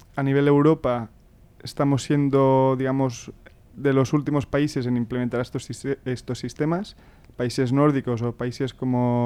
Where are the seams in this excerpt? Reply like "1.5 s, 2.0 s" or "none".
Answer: none